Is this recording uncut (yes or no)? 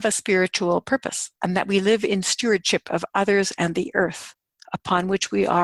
no